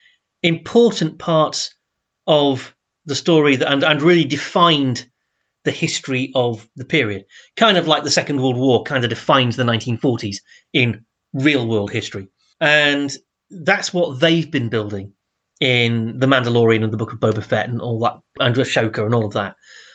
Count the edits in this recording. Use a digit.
2